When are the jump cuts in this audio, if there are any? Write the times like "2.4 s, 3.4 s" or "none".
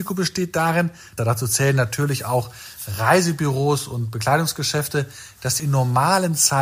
1.2 s, 5.6 s